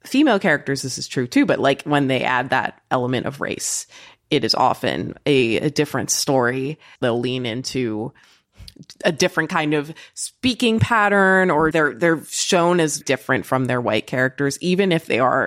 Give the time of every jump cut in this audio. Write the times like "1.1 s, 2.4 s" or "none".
7.0 s, 11.7 s, 13.0 s